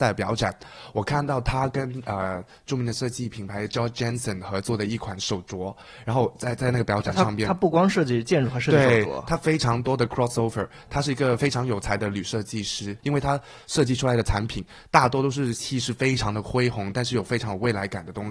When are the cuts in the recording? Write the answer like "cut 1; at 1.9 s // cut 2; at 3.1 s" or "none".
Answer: cut 1; at 13.0 s